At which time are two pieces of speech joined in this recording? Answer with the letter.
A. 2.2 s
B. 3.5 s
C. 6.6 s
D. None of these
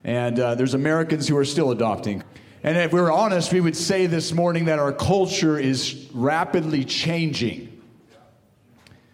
A